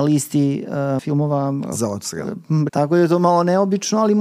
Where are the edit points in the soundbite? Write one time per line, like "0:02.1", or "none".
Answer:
0:01.0
0:02.7